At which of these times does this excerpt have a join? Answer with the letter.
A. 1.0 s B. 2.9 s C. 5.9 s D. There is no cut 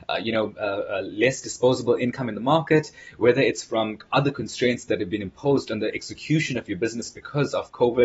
D